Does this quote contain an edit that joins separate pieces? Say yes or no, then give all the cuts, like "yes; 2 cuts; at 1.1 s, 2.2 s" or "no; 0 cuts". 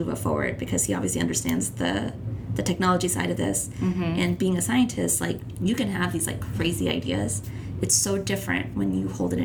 no; 0 cuts